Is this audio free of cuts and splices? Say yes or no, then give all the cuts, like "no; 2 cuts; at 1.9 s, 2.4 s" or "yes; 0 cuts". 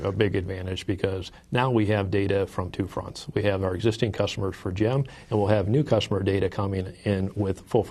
yes; 0 cuts